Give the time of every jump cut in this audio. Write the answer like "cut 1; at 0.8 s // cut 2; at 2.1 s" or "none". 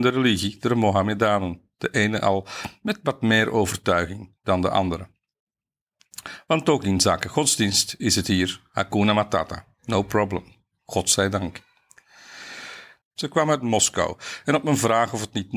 cut 1; at 13.0 s